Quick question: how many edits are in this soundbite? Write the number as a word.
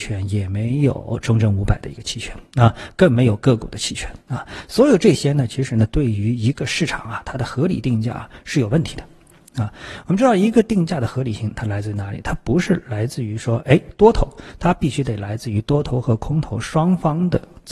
zero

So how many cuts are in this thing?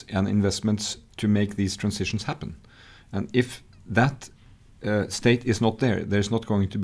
zero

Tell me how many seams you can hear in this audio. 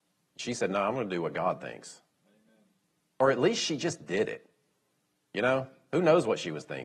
zero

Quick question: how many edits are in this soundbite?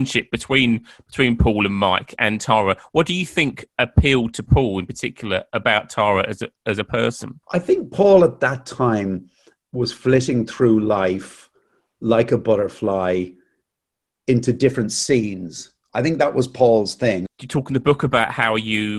two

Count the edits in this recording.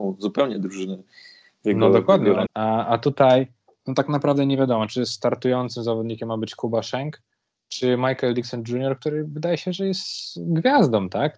one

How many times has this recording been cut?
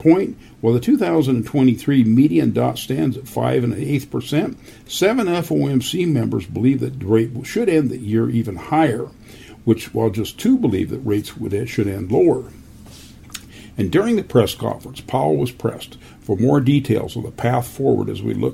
zero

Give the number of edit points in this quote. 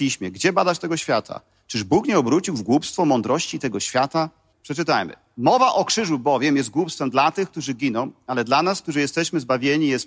one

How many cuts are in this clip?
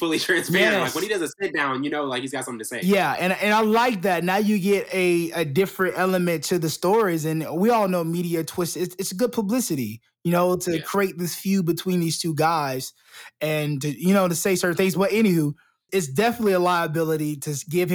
one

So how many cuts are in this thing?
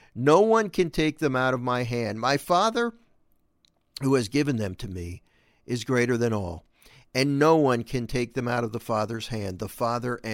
zero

